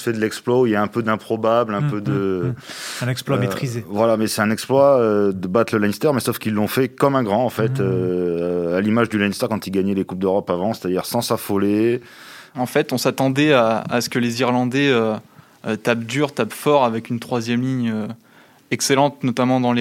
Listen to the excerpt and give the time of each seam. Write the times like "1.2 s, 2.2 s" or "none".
12.5 s